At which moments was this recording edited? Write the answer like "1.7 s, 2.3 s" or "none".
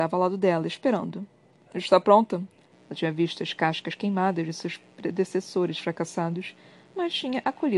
2.7 s